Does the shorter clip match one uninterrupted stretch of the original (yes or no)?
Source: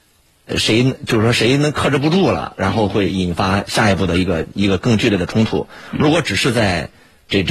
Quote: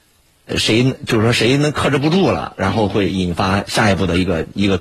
yes